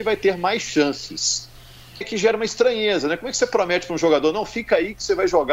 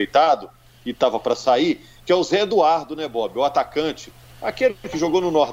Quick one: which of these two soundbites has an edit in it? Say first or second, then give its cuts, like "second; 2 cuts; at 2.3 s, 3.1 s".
first; 1 cut; at 2.0 s